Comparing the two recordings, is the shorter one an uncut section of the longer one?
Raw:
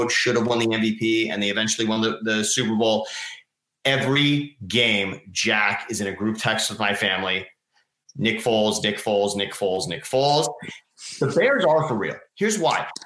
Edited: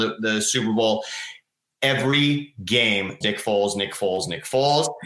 no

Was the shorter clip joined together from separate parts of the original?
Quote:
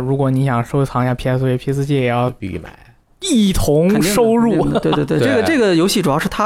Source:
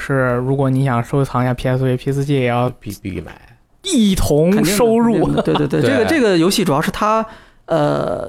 yes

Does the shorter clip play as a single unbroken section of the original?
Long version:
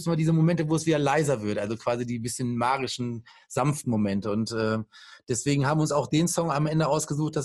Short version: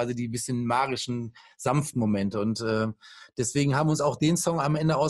yes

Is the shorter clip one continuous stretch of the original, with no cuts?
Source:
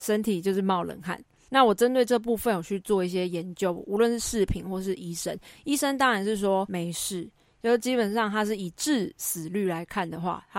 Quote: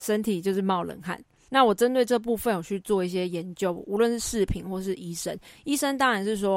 yes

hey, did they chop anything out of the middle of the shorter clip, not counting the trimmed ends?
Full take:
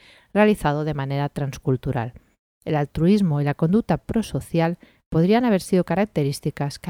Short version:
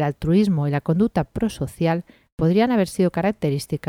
no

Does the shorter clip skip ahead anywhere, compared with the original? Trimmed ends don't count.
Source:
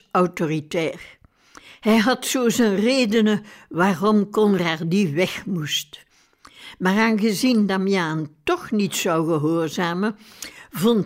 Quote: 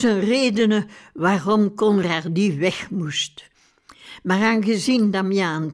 no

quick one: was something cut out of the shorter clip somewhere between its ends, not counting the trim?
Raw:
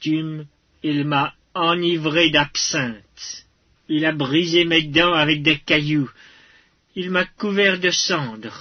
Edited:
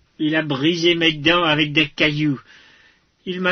no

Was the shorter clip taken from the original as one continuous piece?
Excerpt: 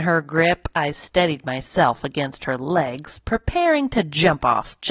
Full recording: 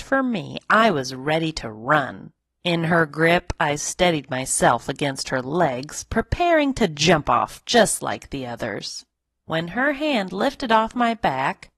yes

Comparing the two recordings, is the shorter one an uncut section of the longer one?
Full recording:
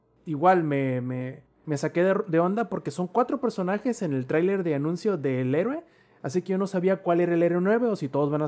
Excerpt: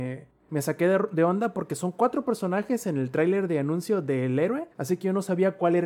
no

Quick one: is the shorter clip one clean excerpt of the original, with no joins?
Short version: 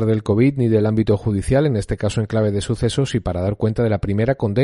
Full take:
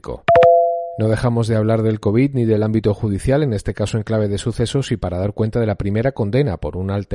yes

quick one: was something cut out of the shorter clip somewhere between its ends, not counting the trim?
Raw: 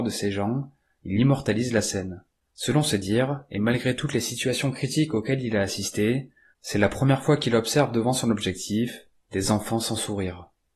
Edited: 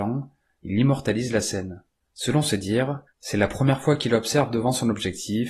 yes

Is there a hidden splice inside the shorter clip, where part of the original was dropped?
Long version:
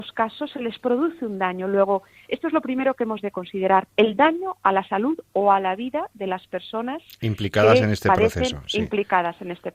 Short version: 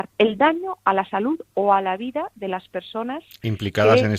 no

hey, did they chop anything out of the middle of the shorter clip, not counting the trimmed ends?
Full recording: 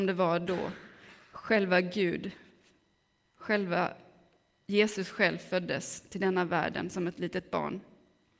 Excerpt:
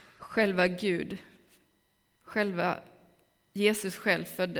no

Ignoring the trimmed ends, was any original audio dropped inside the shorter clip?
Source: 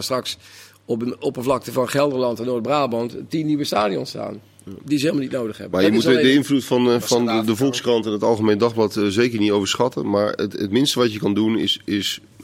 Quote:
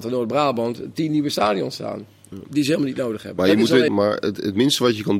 yes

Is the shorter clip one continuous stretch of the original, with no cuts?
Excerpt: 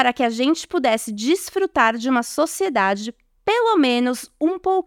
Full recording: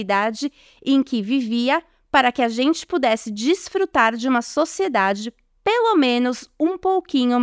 yes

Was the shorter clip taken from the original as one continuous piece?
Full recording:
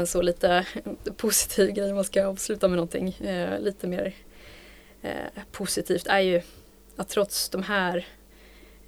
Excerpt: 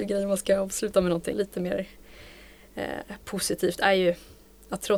no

